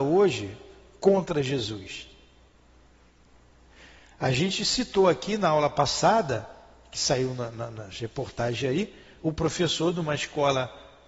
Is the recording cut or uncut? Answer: uncut